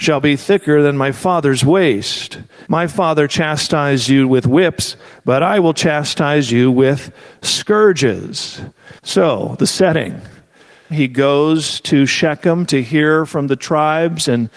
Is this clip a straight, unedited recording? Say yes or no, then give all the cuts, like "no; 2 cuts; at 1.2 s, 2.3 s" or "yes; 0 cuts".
no; 3 cuts; at 2.6 s, 9.0 s, 10.9 s